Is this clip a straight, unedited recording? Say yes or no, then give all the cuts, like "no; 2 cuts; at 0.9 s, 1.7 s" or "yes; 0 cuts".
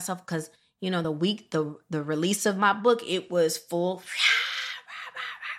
yes; 0 cuts